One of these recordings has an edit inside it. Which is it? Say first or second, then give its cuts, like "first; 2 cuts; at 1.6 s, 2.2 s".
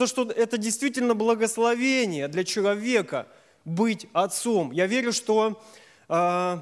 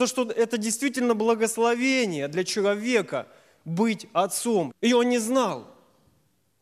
second; 1 cut; at 4.7 s